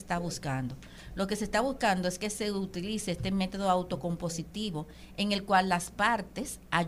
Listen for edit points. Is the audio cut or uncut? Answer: uncut